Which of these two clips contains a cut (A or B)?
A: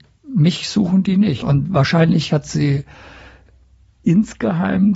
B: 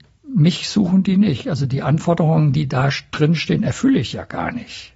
A